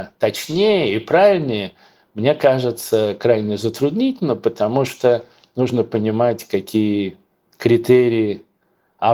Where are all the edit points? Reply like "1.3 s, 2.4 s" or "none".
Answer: none